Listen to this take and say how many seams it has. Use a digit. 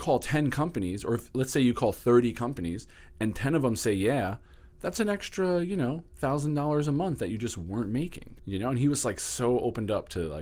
1